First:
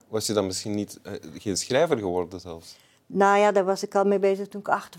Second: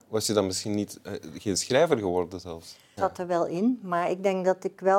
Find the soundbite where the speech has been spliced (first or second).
second